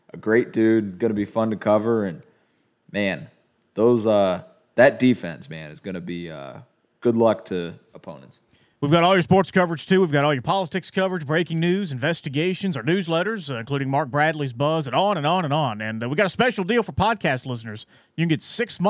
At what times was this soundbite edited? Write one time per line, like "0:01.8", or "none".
none